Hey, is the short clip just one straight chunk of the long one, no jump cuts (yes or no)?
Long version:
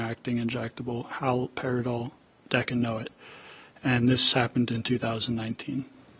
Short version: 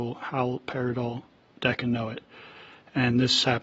yes